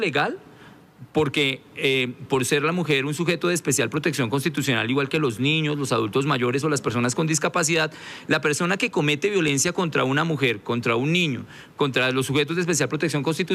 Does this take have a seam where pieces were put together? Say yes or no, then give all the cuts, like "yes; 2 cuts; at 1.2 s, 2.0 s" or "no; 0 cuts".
no; 0 cuts